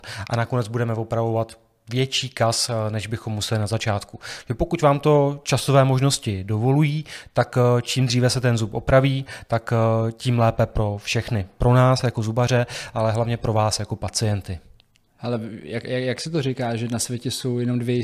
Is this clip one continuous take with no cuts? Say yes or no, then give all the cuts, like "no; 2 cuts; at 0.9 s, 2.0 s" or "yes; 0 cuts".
yes; 0 cuts